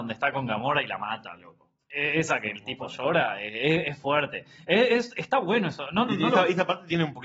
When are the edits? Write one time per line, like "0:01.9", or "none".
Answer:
none